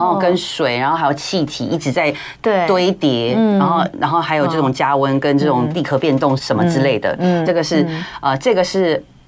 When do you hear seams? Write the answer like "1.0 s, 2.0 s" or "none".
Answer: 6.4 s, 7.5 s